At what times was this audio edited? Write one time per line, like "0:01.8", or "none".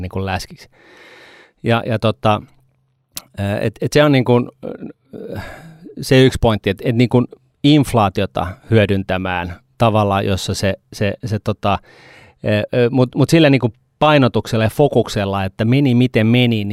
none